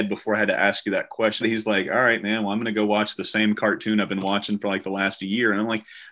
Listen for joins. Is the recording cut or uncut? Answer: cut